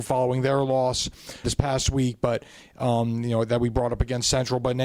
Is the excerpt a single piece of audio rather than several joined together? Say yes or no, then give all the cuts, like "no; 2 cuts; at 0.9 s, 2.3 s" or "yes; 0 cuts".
no; 1 cut; at 1.4 s